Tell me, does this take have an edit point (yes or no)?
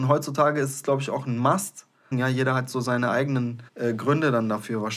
yes